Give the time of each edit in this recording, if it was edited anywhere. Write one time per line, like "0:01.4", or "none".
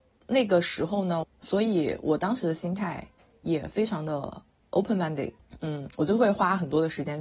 0:01.2